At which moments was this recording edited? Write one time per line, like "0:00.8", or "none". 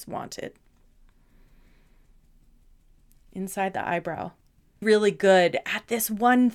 0:04.8